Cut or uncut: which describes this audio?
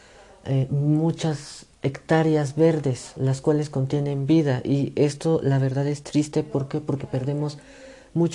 cut